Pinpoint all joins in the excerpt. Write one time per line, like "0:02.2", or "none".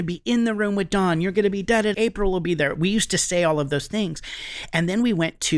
0:01.9